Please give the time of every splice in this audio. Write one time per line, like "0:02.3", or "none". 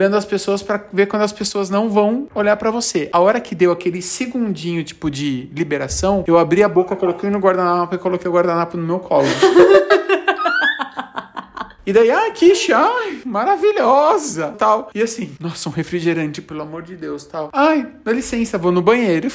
0:14.5